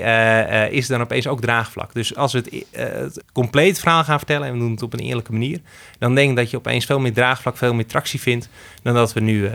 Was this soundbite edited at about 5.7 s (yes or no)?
no